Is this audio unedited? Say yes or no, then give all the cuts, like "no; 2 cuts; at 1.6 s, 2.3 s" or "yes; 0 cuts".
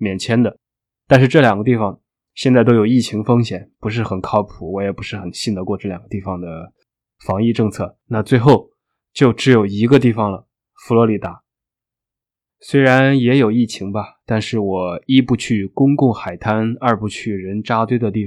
yes; 0 cuts